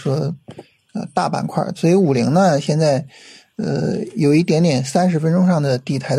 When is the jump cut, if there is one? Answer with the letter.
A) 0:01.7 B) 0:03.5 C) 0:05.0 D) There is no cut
A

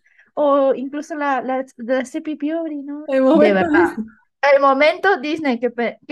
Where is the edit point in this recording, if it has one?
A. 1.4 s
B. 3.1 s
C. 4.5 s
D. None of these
B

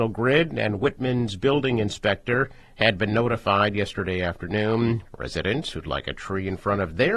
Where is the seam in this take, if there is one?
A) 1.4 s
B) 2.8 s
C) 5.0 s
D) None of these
C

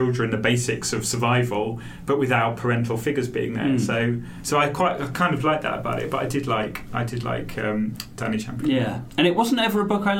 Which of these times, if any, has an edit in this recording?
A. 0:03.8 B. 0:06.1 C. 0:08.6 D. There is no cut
D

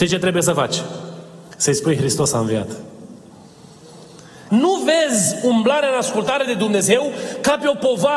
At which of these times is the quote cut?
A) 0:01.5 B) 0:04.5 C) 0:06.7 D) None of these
B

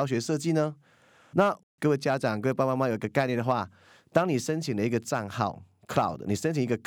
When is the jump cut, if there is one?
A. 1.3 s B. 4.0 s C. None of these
A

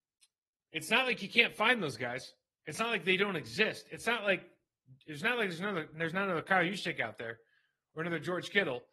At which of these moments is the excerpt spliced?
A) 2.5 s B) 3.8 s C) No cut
C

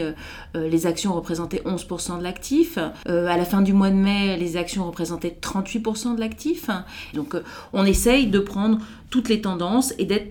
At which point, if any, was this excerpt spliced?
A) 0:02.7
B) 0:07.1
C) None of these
B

